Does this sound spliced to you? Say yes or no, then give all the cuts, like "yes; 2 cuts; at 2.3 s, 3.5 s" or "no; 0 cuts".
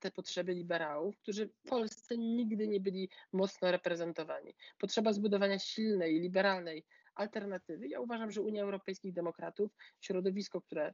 no; 0 cuts